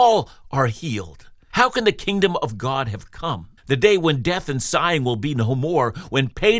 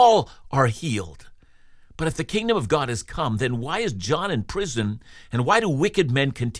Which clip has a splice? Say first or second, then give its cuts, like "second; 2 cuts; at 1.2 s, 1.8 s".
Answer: first; 2 cuts; at 1.5 s, 3.6 s